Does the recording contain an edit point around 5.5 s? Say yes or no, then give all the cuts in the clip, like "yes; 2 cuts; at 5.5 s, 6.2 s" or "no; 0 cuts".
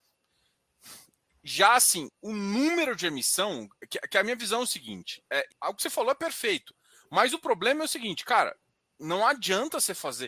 yes; 1 cut; at 5.5 s